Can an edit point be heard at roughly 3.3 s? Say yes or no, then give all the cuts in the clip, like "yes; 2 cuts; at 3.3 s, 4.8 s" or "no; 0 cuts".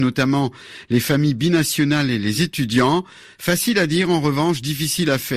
no; 0 cuts